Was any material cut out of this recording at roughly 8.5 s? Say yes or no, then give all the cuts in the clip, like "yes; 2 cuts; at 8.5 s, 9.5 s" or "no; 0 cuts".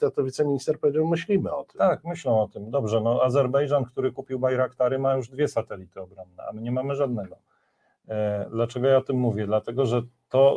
no; 0 cuts